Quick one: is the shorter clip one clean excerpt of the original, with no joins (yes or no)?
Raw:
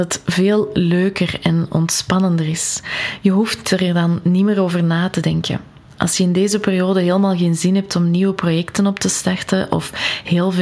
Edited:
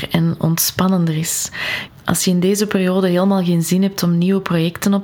no